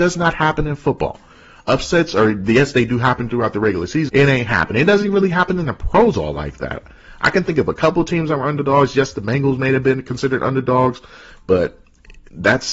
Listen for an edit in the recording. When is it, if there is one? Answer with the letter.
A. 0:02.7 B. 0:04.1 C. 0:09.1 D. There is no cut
B